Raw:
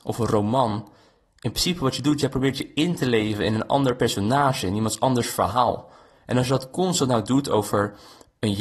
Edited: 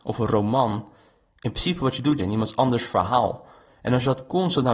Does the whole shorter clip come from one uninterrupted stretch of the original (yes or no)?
no